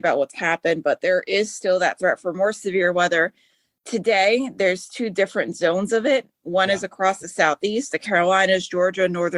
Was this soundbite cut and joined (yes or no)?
no